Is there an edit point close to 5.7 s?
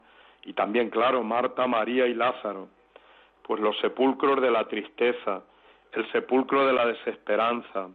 no; 1 cut; at 3.4 s

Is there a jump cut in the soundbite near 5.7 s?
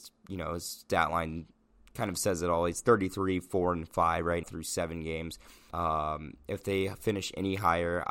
yes; 2 cuts; at 4.4 s, 5.7 s

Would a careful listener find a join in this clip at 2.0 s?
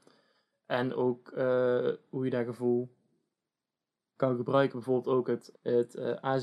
no; 2 cuts; at 4.2 s, 5.5 s

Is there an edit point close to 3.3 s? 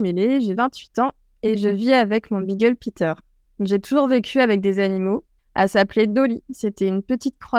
no; 1 cut; at 5.4 s

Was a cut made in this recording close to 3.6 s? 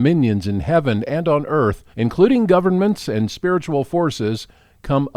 no; 1 cut; at 1.9 s

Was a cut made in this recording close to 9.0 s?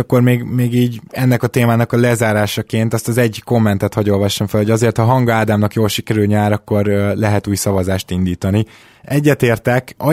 no; 0 cuts

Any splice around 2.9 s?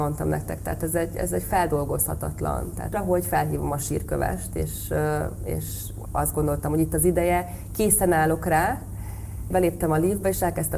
yes; 2 cuts; at 2.9 s, 9.5 s

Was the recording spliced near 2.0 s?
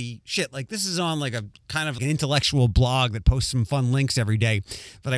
yes; 1 cut; at 2.0 s

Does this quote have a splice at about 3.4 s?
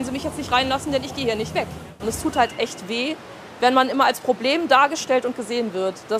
no; 1 cut; at 2.0 s

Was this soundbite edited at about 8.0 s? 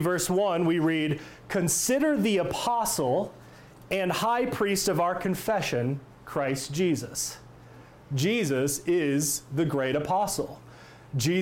no; 0 cuts

